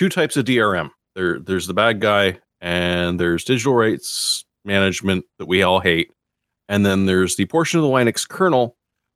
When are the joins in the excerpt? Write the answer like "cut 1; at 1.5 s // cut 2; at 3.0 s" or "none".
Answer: cut 1; at 5.3 s